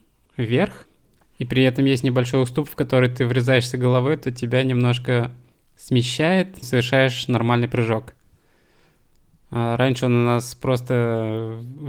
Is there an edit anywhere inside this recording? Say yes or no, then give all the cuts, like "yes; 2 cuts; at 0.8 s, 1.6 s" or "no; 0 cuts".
yes; 2 cuts; at 6.6 s, 9.4 s